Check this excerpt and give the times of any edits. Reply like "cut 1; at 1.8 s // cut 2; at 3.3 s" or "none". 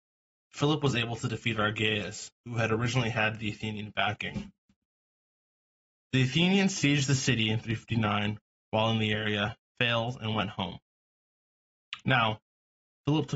none